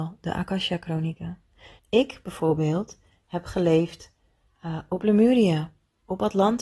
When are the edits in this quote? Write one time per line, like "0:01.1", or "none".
0:01.8